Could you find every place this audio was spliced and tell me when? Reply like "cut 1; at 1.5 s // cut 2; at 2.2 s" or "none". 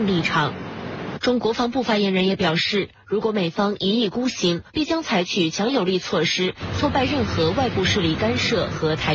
cut 1; at 1.4 s // cut 2; at 4.7 s

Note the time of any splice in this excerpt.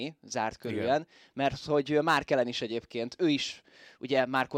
none

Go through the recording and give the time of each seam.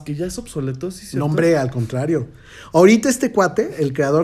none

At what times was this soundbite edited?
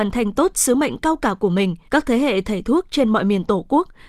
cut 1; at 1.9 s

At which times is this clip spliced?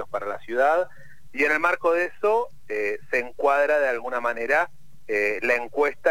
cut 1; at 1.3 s

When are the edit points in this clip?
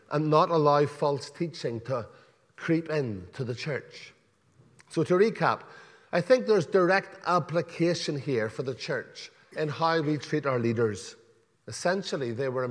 cut 1; at 11.5 s

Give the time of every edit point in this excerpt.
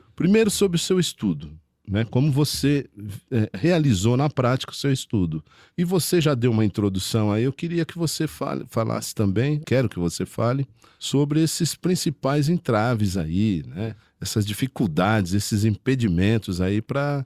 cut 1; at 9.6 s

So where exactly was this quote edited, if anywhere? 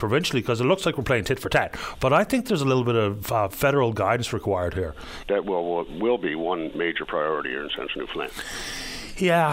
cut 1; at 1.9 s // cut 2; at 5.2 s

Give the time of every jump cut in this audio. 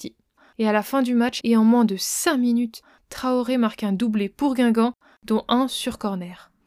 cut 1; at 1.4 s

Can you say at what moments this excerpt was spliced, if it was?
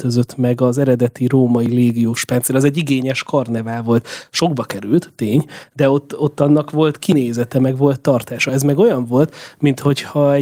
none

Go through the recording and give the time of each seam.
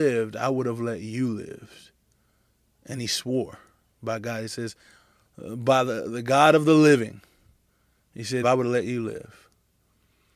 cut 1; at 8.4 s

